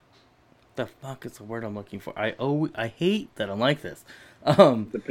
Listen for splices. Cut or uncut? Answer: uncut